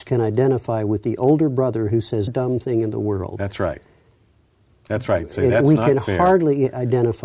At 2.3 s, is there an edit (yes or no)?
yes